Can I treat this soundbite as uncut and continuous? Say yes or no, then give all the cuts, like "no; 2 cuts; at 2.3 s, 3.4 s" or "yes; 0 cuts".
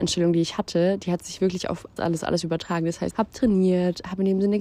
no; 2 cuts; at 2.0 s, 3.1 s